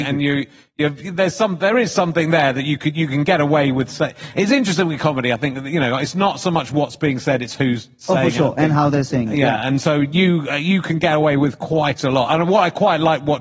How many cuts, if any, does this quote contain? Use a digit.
0